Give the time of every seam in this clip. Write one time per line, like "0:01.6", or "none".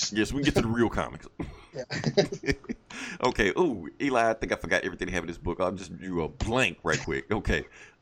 none

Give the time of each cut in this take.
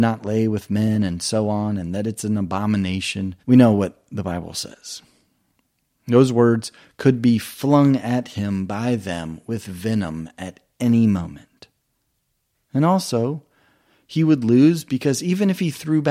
0:03.4

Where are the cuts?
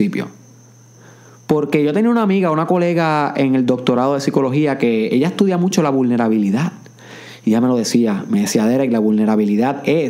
none

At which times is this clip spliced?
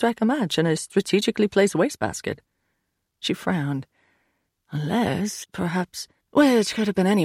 0:05.4

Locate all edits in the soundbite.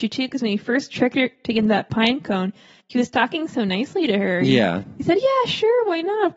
none

